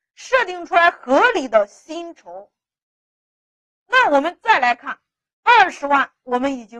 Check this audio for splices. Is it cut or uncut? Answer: uncut